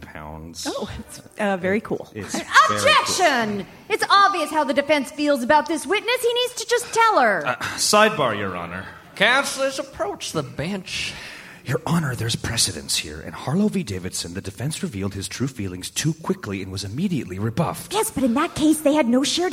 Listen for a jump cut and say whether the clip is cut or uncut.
uncut